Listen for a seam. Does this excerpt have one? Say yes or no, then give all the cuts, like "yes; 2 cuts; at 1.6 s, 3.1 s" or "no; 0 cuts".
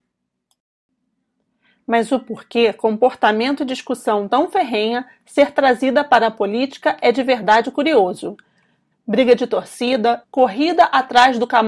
yes; 2 cuts; at 8.9 s, 10.2 s